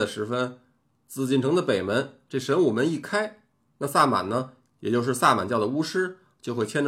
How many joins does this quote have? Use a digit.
0